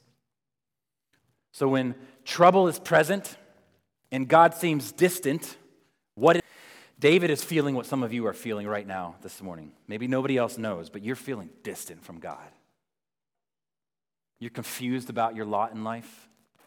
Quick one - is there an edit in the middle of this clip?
no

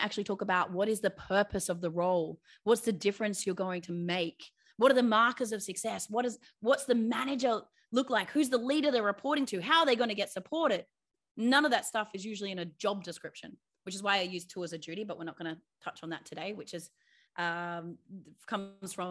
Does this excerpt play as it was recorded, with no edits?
yes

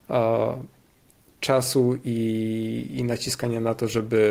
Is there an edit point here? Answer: no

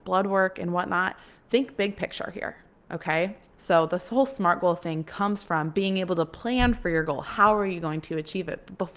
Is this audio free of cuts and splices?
no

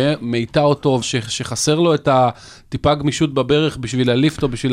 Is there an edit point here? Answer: yes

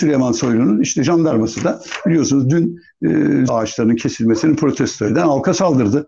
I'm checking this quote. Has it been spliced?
yes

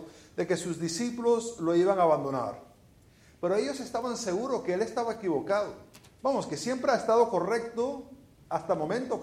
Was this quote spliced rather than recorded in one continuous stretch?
no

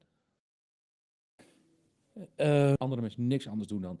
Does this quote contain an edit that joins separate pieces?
yes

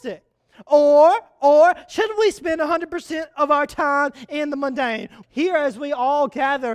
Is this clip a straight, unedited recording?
no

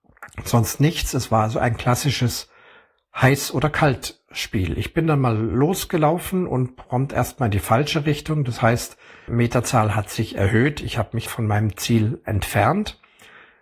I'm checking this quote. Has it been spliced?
yes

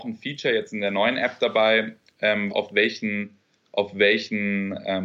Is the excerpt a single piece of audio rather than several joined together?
no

